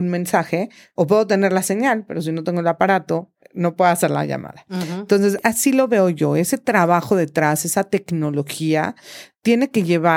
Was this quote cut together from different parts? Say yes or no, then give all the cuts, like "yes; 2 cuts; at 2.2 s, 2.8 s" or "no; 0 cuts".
no; 0 cuts